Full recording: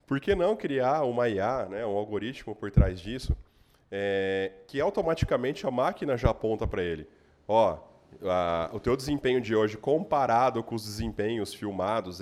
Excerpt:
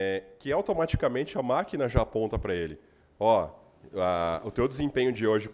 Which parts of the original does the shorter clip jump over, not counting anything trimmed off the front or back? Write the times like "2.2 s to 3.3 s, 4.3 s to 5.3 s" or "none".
none